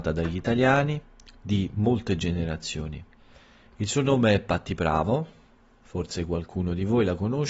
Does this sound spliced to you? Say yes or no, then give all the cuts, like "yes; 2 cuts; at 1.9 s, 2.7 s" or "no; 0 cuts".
no; 0 cuts